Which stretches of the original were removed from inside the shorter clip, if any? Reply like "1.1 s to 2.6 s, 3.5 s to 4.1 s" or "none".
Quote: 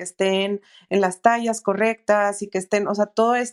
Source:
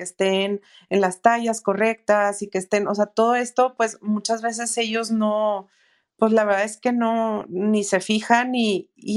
none